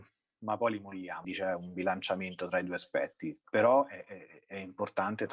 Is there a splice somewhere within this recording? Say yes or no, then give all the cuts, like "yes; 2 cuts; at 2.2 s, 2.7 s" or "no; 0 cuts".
yes; 2 cuts; at 1.2 s, 3.4 s